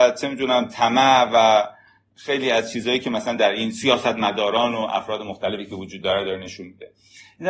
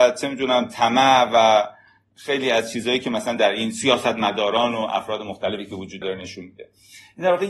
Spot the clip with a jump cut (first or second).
second